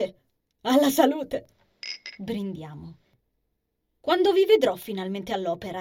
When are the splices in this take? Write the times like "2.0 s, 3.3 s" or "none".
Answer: none